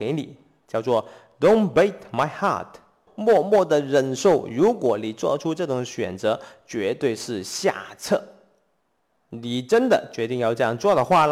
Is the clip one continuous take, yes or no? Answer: no